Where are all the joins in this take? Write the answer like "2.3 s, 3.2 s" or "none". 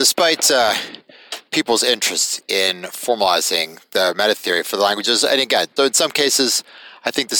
5.8 s